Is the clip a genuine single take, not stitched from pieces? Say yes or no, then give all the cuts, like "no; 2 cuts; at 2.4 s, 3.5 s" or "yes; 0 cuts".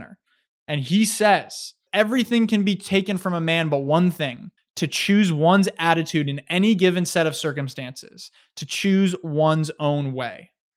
no; 2 cuts; at 1.9 s, 4.6 s